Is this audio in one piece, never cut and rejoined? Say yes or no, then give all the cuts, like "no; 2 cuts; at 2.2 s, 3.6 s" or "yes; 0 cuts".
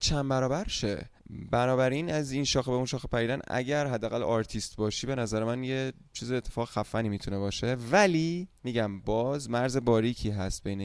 no; 2 cuts; at 1.2 s, 8.6 s